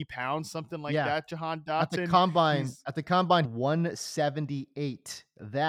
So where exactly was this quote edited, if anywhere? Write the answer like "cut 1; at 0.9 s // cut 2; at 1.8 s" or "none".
cut 1; at 3.4 s